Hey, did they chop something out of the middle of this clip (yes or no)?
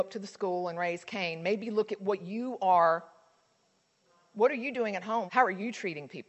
yes